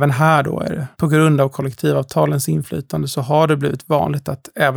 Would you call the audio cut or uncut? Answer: cut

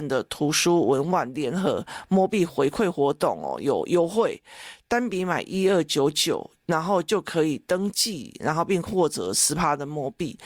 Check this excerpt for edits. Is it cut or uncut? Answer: uncut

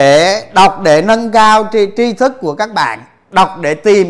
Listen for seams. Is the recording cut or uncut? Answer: uncut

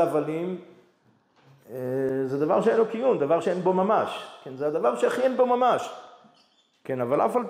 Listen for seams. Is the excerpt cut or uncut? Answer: uncut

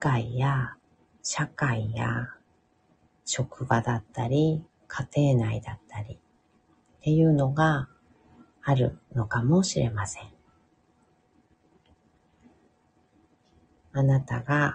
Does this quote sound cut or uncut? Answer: cut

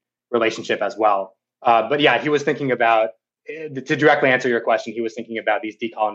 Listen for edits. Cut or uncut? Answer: uncut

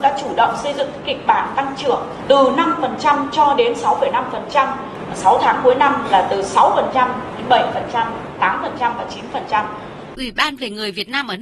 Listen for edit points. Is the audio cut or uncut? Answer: cut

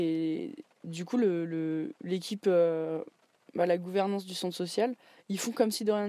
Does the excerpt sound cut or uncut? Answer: uncut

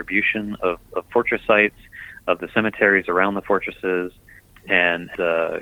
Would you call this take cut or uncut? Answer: uncut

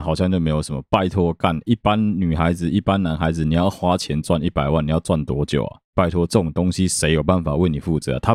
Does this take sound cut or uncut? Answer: cut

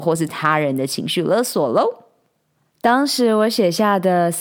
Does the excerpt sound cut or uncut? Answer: uncut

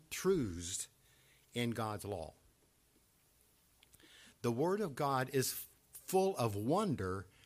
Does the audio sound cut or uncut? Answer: uncut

